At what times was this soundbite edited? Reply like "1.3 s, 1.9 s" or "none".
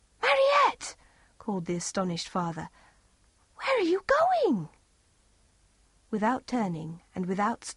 none